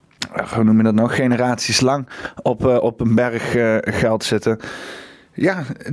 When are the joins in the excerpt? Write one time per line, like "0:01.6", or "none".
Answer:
none